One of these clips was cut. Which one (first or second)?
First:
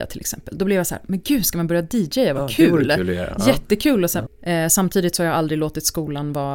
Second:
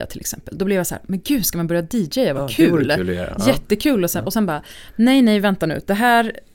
first